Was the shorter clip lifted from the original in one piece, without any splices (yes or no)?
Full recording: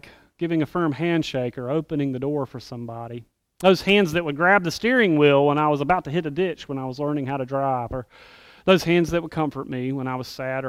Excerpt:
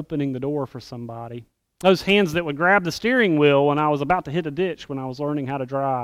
yes